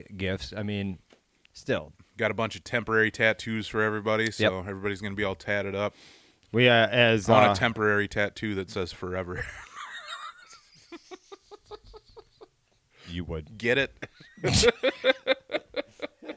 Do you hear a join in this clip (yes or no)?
no